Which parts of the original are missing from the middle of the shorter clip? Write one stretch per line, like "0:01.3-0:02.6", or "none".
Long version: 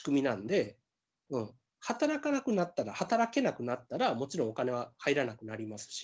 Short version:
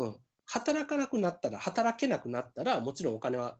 none